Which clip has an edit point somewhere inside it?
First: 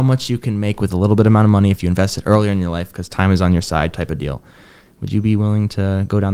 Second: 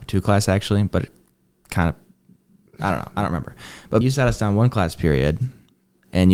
second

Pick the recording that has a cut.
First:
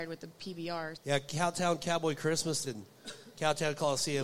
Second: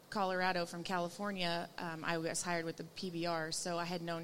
first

